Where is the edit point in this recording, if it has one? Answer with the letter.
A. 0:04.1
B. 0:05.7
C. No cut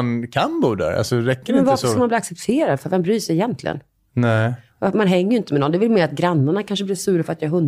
C